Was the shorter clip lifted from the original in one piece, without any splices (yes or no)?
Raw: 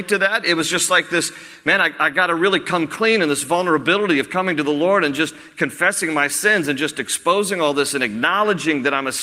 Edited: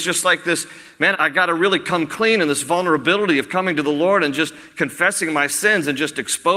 no